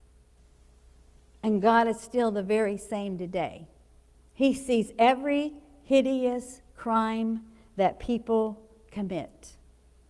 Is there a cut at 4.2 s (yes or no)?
yes